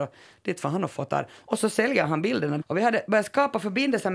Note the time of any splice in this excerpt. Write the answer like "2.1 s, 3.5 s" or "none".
2.6 s